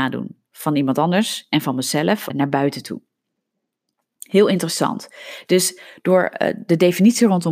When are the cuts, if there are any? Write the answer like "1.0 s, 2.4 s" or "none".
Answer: 2.3 s